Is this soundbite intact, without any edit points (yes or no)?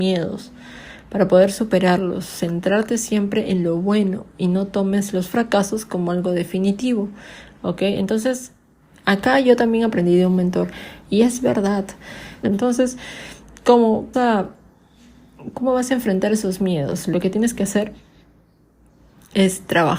no